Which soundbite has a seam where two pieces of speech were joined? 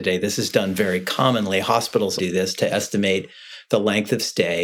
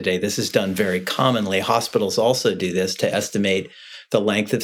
first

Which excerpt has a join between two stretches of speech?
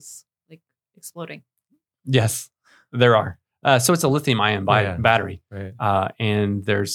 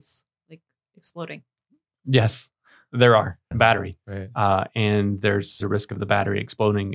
second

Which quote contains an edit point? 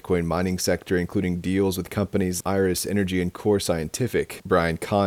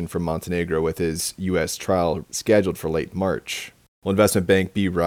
first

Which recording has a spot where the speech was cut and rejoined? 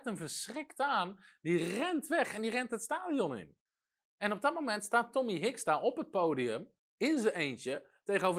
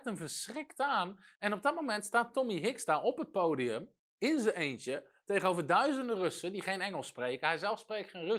second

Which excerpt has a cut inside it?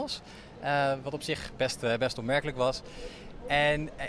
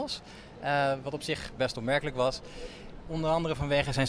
second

